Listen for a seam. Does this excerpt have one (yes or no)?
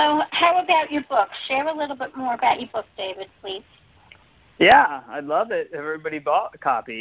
no